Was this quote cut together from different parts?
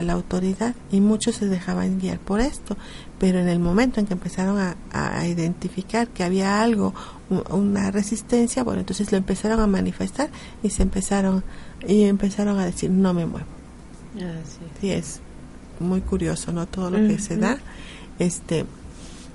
no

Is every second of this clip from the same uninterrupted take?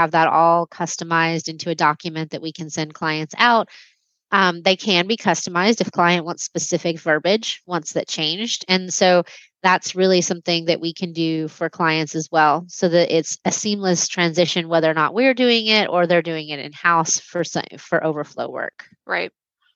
yes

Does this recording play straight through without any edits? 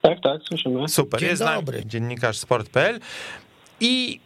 no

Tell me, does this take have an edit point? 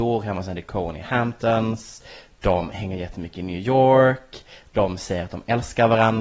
no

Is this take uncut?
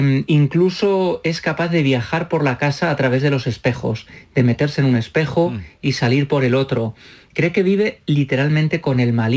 yes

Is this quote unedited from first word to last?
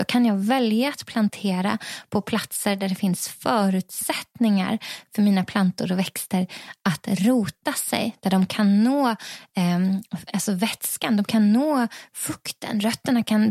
yes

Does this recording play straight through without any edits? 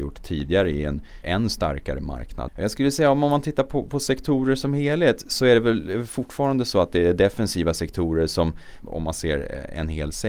no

